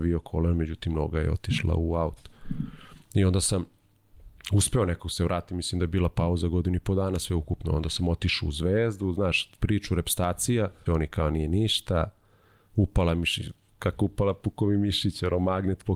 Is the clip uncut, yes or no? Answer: no